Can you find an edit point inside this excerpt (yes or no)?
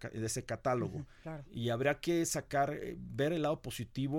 yes